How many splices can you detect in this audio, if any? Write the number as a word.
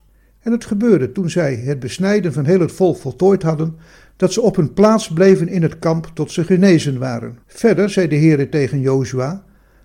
one